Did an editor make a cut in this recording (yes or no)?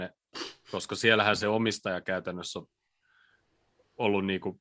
no